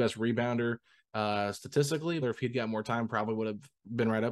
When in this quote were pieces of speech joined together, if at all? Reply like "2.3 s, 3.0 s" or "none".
2.2 s